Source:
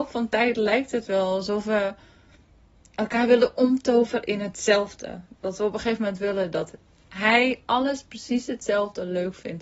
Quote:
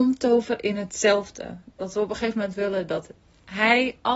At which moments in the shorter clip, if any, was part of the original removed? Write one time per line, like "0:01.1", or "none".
none